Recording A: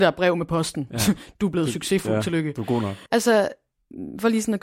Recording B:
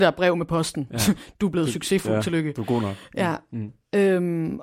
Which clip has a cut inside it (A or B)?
A